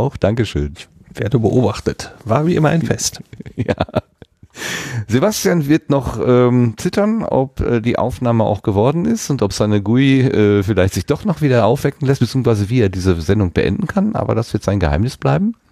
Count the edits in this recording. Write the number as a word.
zero